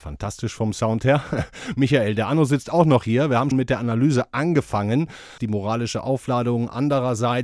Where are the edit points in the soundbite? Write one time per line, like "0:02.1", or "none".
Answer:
0:03.5
0:05.4